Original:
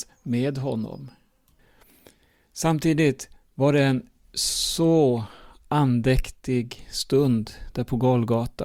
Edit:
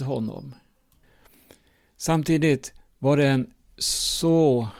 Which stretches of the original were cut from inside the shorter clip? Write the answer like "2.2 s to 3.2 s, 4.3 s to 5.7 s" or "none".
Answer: none